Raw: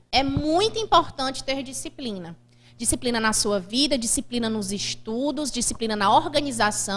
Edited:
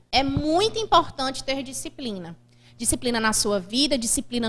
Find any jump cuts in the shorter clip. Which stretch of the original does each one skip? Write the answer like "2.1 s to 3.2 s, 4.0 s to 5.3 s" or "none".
none